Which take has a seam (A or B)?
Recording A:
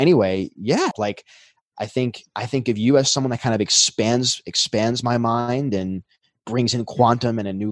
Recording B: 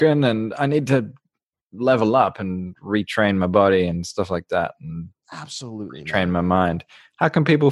A